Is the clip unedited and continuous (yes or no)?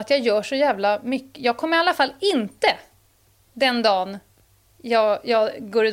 yes